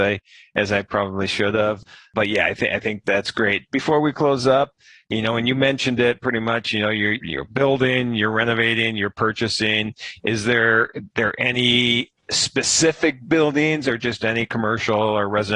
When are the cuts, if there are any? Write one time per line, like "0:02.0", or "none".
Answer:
none